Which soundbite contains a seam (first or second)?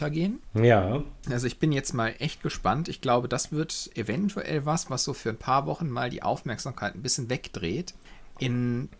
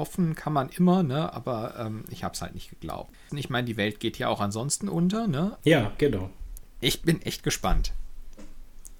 second